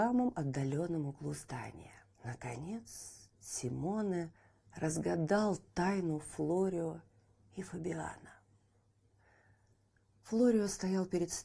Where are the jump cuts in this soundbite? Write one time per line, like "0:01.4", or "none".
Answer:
0:02.1